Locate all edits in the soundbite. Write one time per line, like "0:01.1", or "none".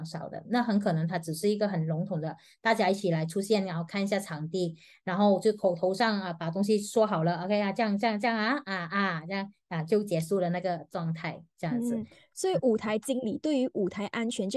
none